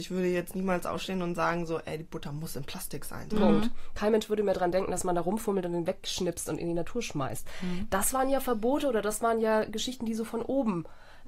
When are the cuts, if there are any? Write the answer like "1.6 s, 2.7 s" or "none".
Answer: 3.3 s